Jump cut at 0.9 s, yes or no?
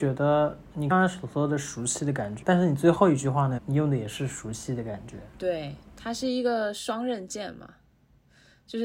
yes